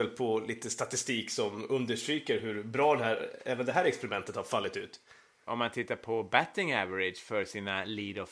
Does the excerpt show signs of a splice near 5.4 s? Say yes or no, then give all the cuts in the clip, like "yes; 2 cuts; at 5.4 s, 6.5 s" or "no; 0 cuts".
yes; 1 cut; at 5.4 s